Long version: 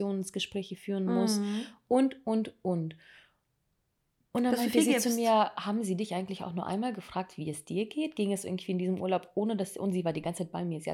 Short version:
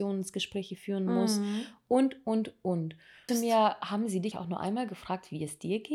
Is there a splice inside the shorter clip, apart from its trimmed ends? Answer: yes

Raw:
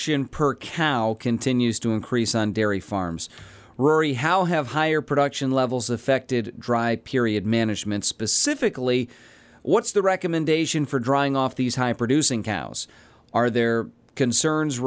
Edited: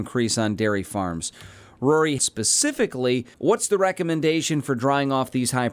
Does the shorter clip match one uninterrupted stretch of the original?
no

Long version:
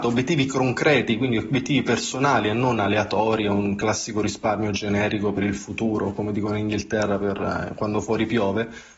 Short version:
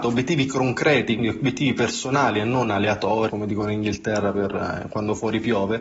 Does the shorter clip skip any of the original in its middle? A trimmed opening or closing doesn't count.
yes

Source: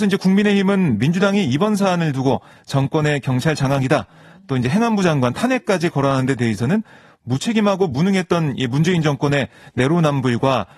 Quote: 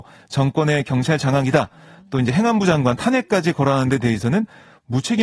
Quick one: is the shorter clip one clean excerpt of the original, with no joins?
yes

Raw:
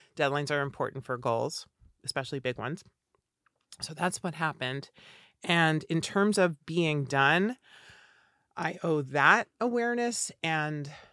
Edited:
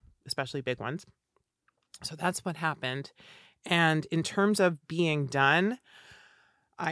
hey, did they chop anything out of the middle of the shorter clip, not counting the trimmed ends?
no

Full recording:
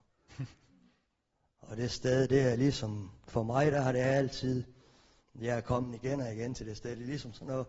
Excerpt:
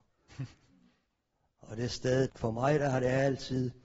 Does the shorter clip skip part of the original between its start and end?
yes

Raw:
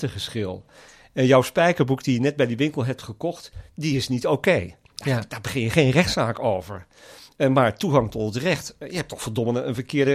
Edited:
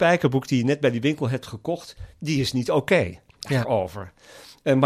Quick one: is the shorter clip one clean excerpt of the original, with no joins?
no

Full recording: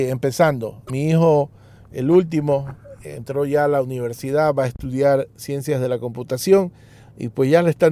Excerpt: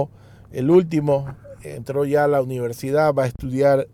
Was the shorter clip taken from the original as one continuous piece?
yes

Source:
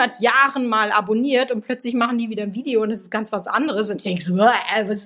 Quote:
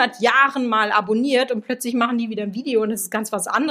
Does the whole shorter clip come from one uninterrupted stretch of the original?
yes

